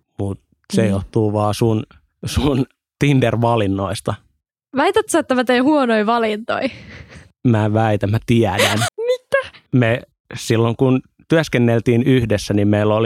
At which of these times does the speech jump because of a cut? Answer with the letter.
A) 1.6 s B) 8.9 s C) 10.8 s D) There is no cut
B